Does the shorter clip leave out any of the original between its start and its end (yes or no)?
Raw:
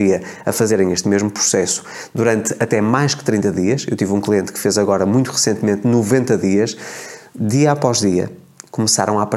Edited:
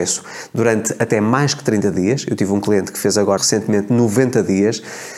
yes